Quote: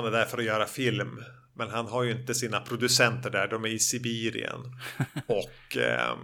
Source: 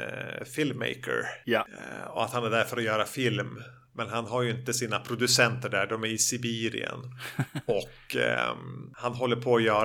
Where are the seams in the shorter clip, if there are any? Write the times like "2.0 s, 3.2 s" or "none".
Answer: none

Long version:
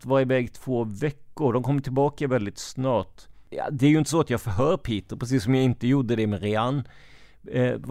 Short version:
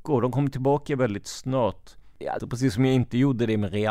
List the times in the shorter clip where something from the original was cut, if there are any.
2.4 s

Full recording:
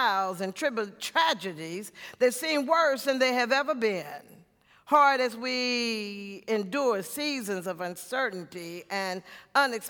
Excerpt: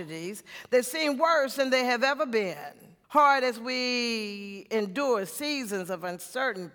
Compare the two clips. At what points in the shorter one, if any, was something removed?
3.0 s

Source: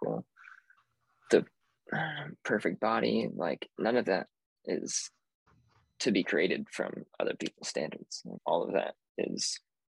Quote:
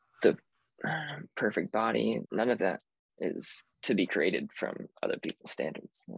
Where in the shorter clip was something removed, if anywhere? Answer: 2.2 s, 3.7 s

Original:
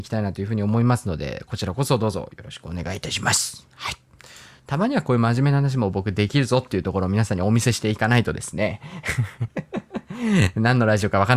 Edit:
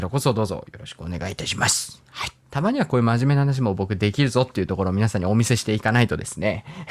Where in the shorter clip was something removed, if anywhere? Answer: 2.4 s

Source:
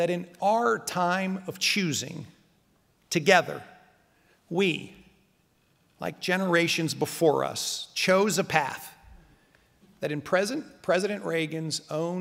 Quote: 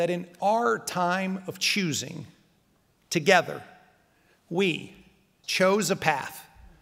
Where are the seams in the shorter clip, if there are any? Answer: 5.4 s

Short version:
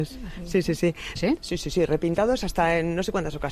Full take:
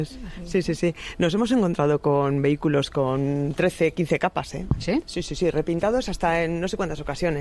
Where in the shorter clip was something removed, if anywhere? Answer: 1.2 s

